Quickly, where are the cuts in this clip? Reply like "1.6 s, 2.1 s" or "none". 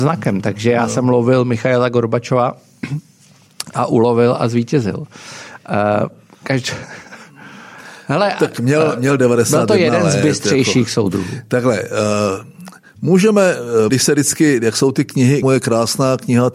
13.9 s, 15.4 s